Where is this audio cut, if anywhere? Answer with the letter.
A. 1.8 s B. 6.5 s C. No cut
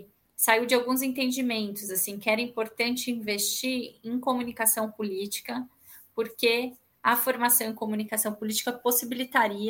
C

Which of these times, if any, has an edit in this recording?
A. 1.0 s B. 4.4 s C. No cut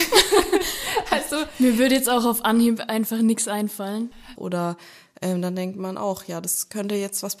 B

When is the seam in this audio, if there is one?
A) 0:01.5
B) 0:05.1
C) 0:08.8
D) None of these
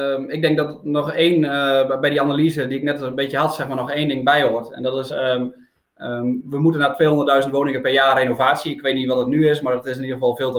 D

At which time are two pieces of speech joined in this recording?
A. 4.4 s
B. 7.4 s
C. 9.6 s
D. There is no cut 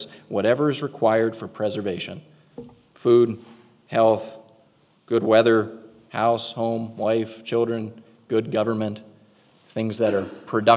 D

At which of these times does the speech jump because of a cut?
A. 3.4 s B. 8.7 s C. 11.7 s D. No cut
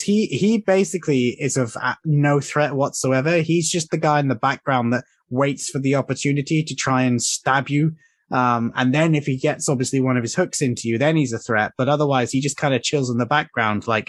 D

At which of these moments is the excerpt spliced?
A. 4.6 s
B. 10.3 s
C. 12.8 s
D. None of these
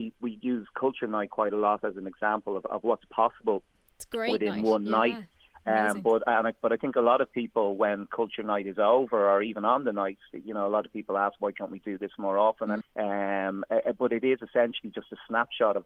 C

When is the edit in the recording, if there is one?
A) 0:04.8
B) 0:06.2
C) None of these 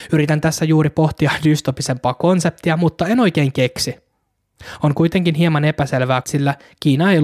B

